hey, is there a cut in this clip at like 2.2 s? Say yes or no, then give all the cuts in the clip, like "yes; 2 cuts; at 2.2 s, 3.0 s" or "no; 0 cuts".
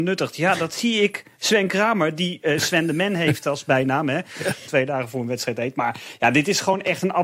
no; 1 cut; at 4.6 s